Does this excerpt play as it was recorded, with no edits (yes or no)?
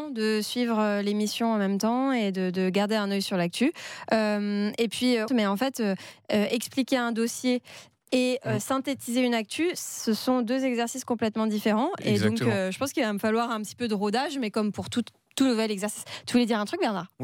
no